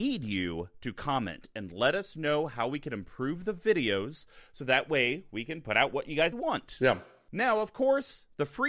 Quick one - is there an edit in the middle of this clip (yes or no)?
yes